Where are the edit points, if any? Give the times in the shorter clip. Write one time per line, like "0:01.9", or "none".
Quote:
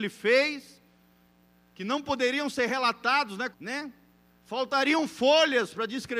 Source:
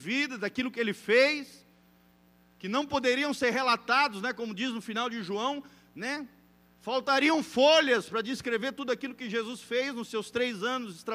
0:03.5